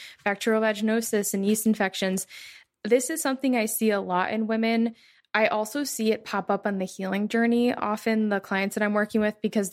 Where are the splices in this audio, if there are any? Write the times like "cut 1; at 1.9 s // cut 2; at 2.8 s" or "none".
none